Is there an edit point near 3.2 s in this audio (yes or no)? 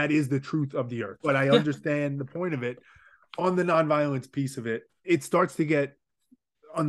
no